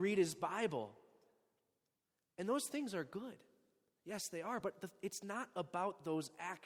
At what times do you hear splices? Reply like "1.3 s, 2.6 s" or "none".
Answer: none

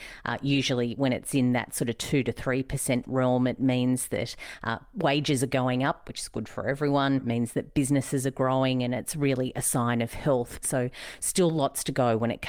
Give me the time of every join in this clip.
7.2 s, 10.6 s

